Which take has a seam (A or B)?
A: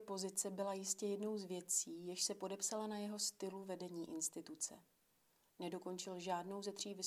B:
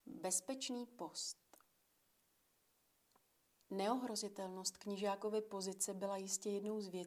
A